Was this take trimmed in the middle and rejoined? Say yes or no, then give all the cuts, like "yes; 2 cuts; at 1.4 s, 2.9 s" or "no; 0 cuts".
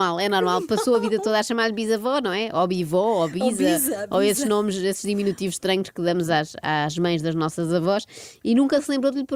no; 0 cuts